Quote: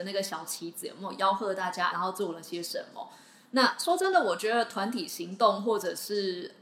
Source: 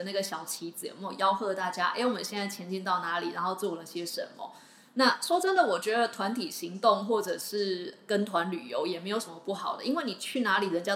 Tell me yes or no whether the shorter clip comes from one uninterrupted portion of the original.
no